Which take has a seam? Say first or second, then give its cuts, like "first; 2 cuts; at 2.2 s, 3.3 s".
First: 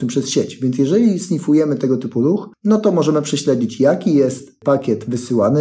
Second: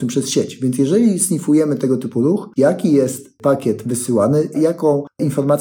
second; 2 cuts; at 2.6 s, 4.5 s